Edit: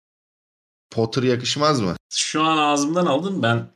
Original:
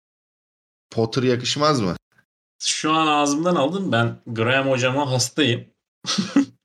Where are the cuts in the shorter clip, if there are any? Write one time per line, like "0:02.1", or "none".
0:02.0